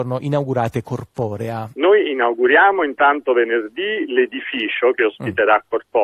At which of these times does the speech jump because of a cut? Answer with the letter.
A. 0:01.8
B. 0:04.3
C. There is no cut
A